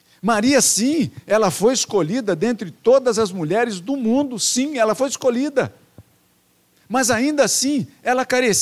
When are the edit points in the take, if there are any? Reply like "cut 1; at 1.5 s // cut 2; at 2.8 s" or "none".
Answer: none